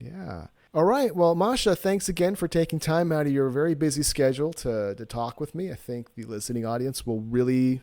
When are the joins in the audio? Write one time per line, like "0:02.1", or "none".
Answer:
none